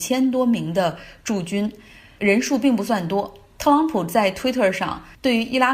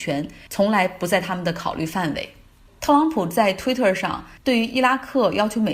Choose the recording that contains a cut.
second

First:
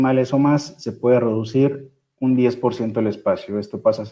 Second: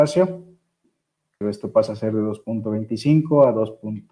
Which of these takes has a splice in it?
second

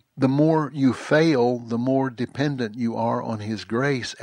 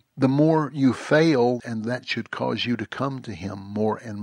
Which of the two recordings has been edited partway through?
second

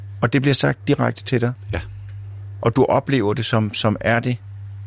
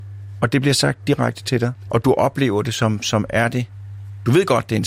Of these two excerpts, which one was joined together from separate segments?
second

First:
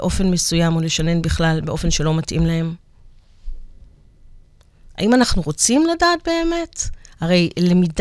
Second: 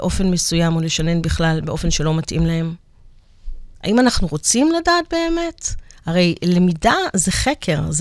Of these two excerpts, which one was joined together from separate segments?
second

